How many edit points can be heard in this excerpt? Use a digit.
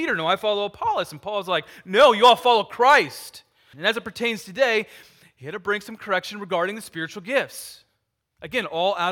1